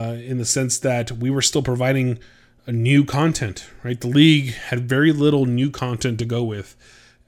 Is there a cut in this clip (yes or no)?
no